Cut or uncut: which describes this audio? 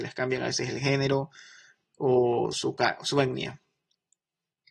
uncut